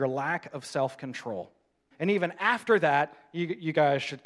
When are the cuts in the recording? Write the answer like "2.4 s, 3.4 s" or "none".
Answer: 1.9 s